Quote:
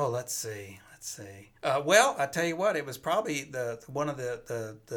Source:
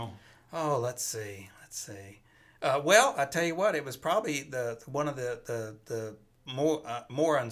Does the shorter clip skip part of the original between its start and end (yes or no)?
yes